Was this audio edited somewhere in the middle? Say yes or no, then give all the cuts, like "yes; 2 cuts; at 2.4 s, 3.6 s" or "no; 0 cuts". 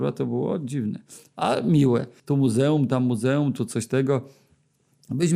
yes; 1 cut; at 2.2 s